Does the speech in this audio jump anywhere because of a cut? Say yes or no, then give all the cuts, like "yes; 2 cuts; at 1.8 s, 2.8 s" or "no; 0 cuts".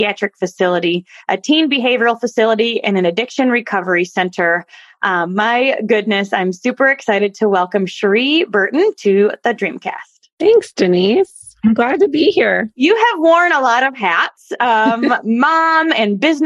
no; 0 cuts